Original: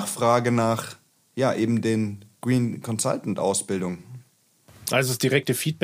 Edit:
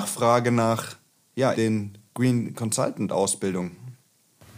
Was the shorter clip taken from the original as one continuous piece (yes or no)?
no